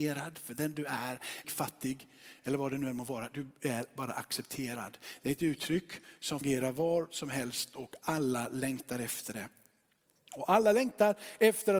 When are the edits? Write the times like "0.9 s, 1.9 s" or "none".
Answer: 1.4 s